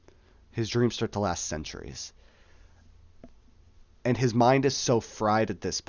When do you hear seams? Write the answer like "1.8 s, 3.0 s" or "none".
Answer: 4.0 s